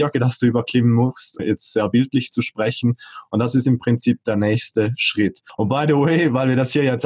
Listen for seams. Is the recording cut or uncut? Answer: cut